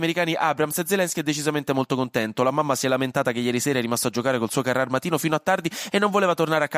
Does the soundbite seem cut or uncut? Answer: uncut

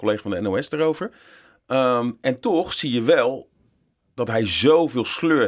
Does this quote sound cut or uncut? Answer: uncut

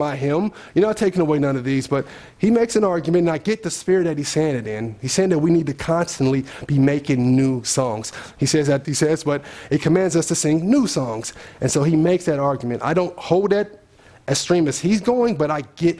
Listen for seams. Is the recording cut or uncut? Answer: cut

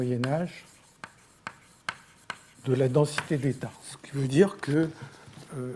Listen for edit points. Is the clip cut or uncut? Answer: uncut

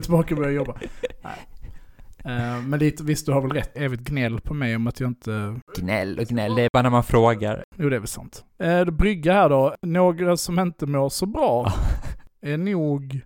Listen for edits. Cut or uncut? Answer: cut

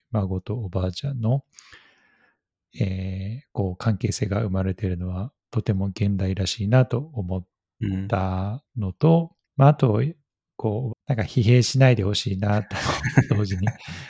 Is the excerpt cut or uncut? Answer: cut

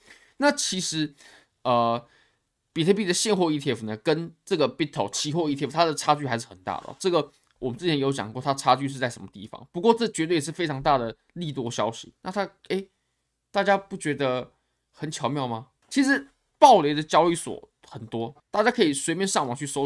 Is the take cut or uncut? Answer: cut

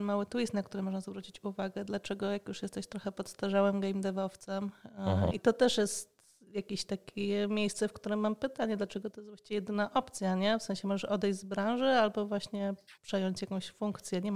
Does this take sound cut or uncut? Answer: cut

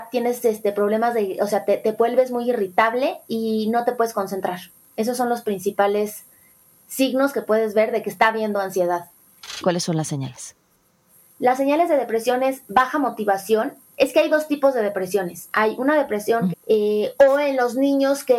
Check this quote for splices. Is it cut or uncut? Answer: cut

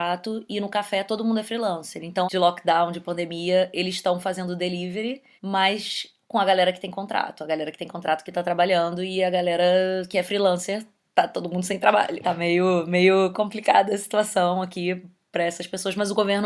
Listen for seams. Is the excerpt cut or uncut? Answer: cut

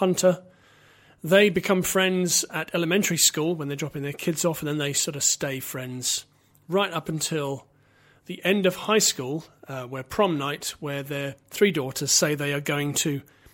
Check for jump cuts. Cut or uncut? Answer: uncut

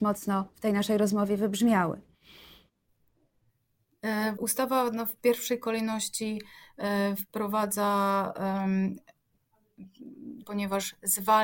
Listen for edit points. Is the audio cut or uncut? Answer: cut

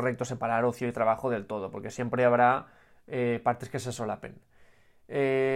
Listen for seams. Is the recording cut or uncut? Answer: uncut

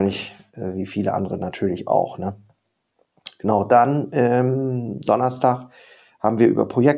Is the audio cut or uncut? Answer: uncut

